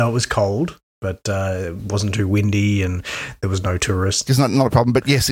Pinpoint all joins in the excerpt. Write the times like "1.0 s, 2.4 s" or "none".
4.3 s